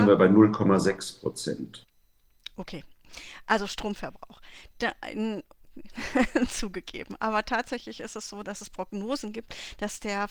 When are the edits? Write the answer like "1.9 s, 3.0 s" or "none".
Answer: none